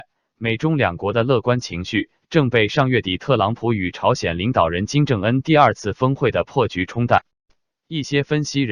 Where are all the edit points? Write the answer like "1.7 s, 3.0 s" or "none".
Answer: none